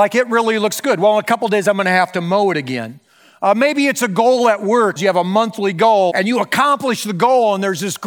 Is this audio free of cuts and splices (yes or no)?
no